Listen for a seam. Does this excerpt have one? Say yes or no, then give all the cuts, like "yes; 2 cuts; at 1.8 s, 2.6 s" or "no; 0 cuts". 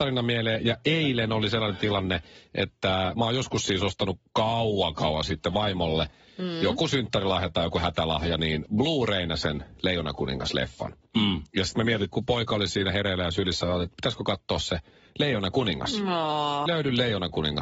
yes; 2 cuts; at 12.1 s, 16.7 s